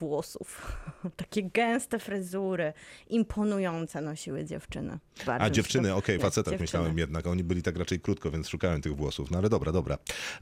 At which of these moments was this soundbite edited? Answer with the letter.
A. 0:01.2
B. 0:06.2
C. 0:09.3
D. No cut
B